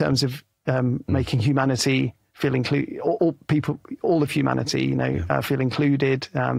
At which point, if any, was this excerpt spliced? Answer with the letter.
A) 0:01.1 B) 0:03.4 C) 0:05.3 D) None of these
D